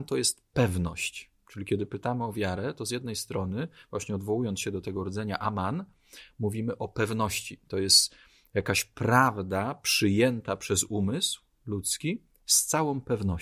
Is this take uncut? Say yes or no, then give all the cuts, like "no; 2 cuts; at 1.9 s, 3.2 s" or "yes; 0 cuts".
yes; 0 cuts